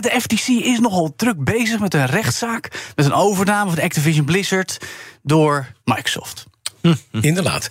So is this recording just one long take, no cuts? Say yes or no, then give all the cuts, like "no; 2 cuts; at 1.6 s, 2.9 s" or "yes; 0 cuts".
no; 1 cut; at 5.8 s